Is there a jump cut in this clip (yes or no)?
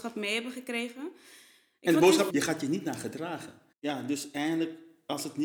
yes